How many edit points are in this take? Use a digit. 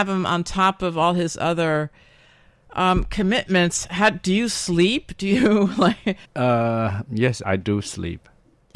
2